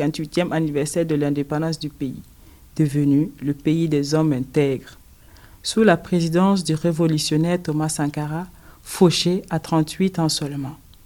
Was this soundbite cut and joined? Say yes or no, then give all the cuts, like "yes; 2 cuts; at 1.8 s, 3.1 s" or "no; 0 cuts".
no; 0 cuts